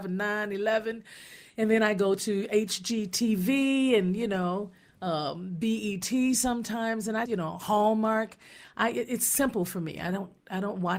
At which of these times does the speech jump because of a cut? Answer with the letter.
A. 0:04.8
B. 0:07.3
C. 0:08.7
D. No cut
B